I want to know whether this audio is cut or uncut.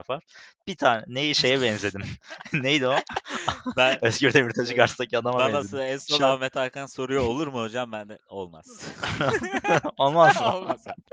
uncut